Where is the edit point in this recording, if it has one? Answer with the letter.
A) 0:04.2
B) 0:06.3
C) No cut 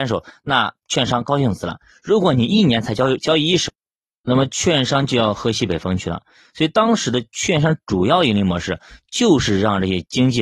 C